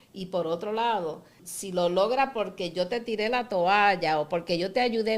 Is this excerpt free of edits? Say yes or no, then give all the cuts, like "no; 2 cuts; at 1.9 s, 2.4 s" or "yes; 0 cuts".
no; 1 cut; at 1.4 s